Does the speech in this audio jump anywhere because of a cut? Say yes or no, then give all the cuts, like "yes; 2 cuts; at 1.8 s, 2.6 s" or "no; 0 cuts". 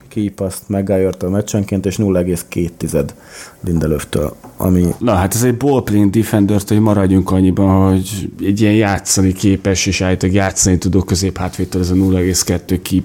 no; 0 cuts